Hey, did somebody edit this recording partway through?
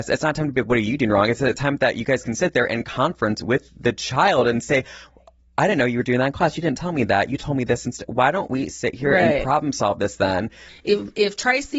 yes; 1 cut; at 10.7 s

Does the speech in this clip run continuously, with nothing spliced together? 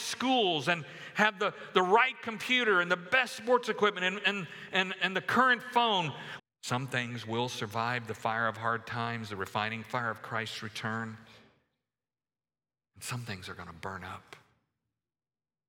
no; 1 cut; at 6.4 s

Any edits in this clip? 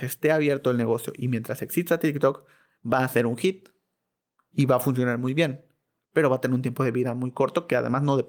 no; 0 cuts

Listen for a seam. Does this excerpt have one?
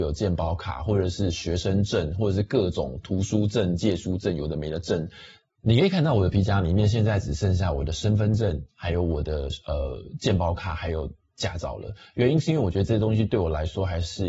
no; 0 cuts

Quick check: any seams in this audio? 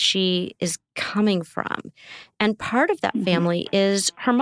no; 0 cuts

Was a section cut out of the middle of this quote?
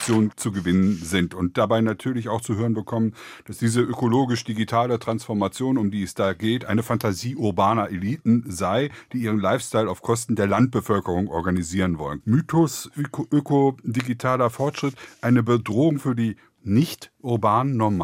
yes; 1 cut; at 12.2 s

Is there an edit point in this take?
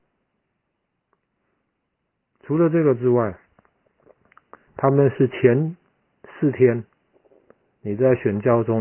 yes; 1 cut; at 4.7 s

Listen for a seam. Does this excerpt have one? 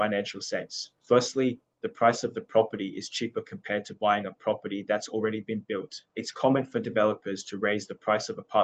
yes; 1 cut; at 1.7 s

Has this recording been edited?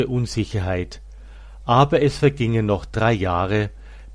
no; 0 cuts

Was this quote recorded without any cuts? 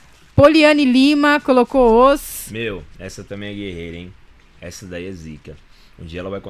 yes; 0 cuts

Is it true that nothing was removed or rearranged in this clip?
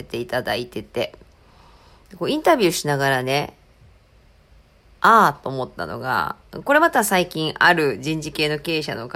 yes; 0 cuts

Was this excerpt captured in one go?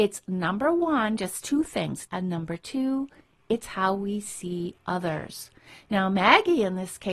no; 1 cut; at 2.1 s

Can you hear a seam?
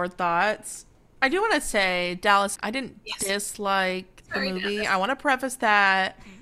yes; 1 cut; at 2.6 s

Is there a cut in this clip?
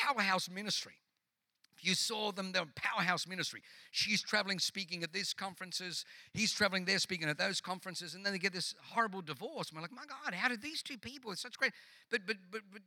no; 0 cuts

